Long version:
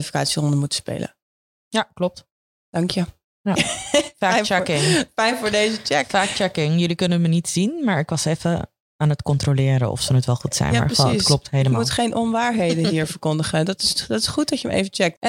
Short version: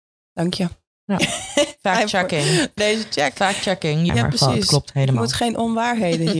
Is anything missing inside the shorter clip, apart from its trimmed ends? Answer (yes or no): yes